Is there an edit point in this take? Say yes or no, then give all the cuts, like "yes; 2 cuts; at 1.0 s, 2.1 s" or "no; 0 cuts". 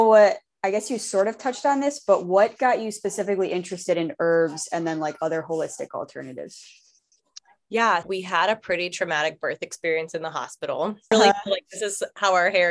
yes; 2 cuts; at 8.0 s, 11.1 s